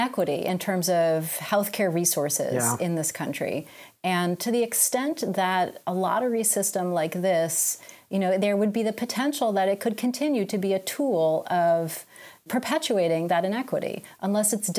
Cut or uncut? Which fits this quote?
uncut